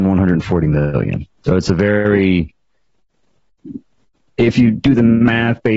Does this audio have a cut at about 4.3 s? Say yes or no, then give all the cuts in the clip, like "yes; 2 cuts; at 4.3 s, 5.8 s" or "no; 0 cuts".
no; 1 cut; at 1.3 s